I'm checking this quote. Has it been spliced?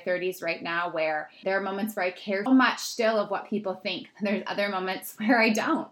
yes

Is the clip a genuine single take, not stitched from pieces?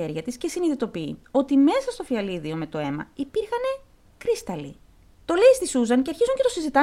no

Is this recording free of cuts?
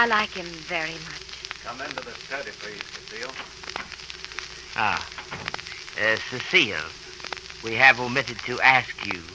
yes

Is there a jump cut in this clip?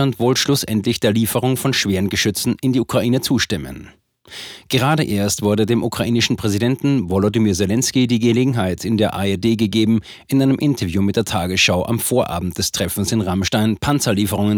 no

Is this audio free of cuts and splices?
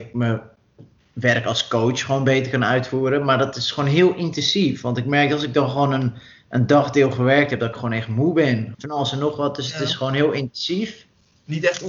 no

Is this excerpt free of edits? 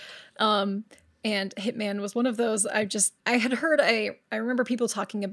no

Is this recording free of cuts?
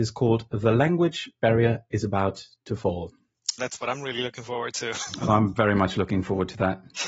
no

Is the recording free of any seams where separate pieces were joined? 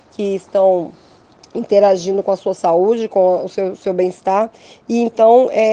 yes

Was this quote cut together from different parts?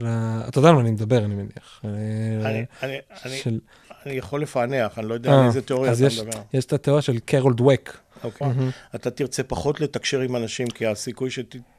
yes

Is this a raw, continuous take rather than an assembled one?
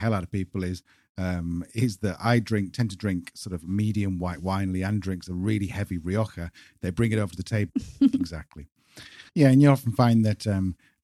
no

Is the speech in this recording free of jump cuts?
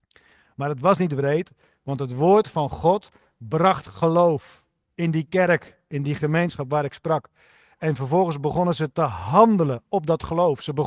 yes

